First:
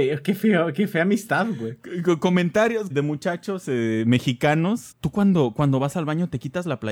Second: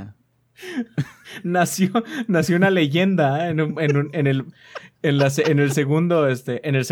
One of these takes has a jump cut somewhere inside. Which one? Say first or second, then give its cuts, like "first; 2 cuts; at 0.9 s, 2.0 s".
first; 2 cuts; at 2.9 s, 4.9 s